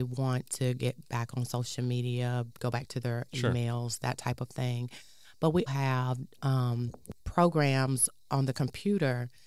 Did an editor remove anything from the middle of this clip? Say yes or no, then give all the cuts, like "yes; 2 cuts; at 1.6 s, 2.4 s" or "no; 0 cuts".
yes; 3 cuts; at 2.5 s, 5.7 s, 7.2 s